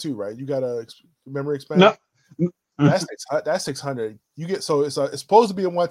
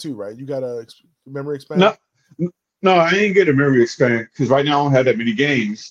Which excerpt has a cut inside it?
first; 1 cut; at 2.7 s

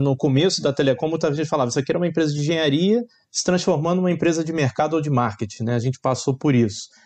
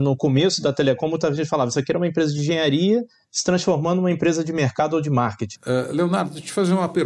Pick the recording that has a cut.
second; 1 cut; at 5.6 s

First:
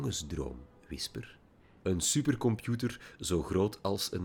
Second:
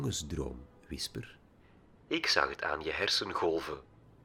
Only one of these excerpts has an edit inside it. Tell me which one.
first; 1 cut; at 1.8 s

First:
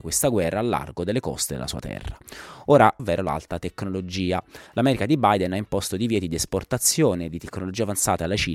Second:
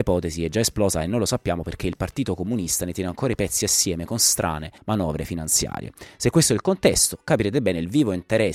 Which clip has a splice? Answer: first; 1 cut; at 3.0 s

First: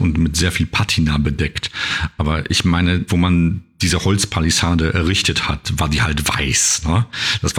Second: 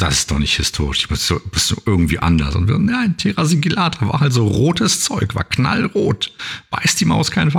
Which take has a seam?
first; 1 cut; at 3.1 s

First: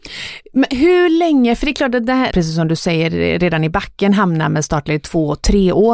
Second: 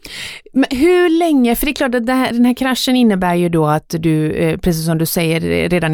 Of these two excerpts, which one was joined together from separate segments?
first; 1 cut; at 2.3 s

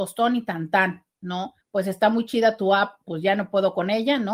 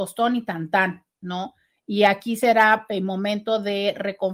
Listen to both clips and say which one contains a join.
first; 2 cuts; at 1.6 s, 3.0 s

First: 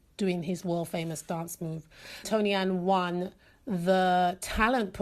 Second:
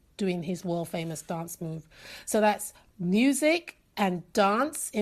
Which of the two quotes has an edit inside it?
first; 1 cut; at 2.2 s

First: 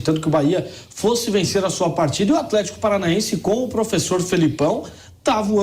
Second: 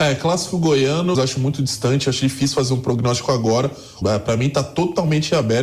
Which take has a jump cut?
second; 2 cuts; at 1.1 s, 4.0 s

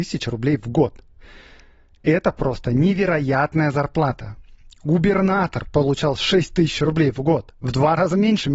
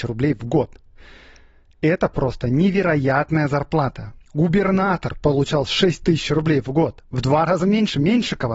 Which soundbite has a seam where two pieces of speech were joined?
second; 1 cut; at 4.2 s

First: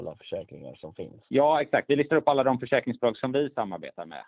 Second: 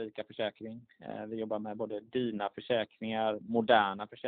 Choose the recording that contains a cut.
first; 1 cut; at 1.3 s

